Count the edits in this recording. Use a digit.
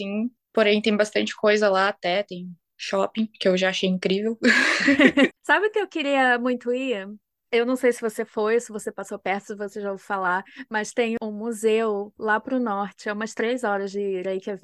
1